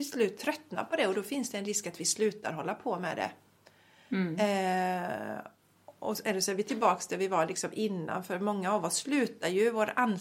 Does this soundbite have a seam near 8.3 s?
no; 0 cuts

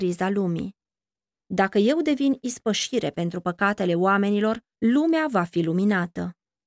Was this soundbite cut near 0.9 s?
no; 0 cuts

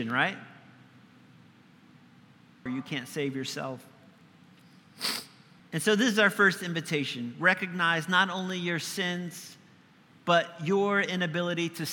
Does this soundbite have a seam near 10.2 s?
no; 2 cuts; at 2.7 s, 5.6 s

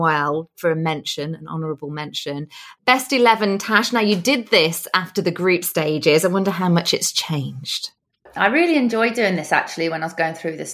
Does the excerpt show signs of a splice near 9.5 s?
no; 0 cuts

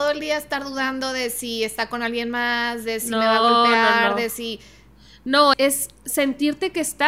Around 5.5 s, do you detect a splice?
yes; 1 cut; at 5.5 s

